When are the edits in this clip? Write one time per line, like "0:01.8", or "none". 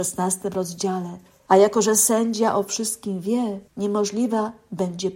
0:01.5
0:03.7

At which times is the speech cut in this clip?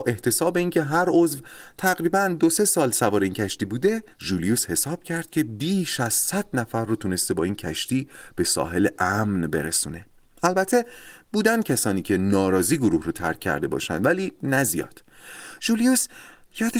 0:04.1

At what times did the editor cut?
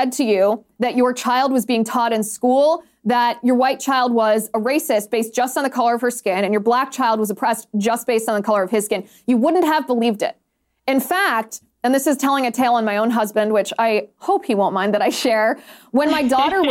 none

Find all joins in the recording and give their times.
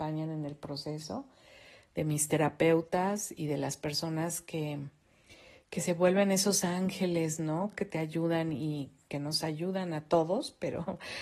none

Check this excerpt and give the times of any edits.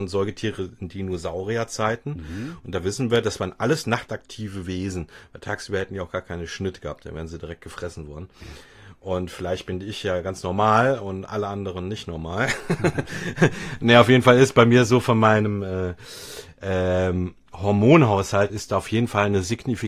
0:18.5

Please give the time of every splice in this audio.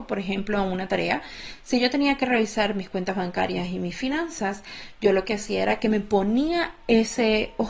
none

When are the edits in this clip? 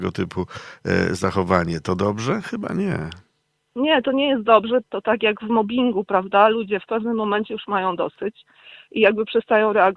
0:04.8

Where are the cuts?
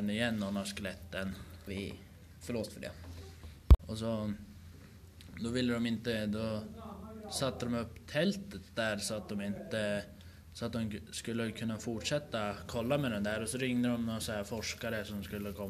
0:01.7
0:03.8

